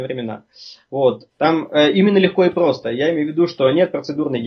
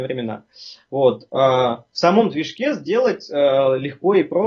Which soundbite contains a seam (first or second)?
first